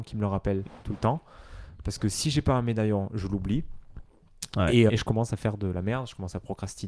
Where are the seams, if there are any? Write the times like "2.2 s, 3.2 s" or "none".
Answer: 4.9 s